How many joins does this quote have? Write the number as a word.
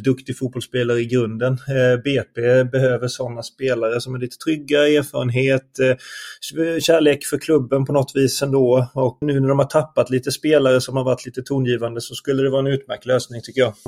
one